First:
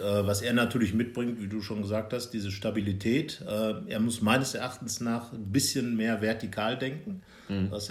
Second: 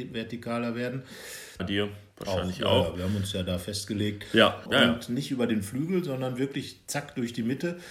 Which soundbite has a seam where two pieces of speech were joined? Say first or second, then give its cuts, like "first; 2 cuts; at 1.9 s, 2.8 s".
second; 2 cuts; at 1.6 s, 4.7 s